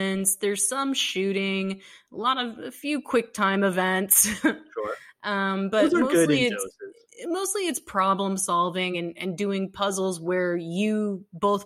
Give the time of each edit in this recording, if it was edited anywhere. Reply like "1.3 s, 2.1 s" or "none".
none